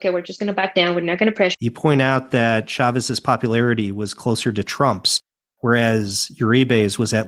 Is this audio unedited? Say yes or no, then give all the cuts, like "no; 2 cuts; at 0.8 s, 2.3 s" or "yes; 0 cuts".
no; 1 cut; at 1.5 s